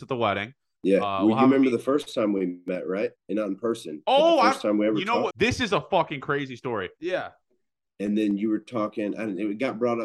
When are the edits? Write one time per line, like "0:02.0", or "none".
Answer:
0:05.3
0:07.0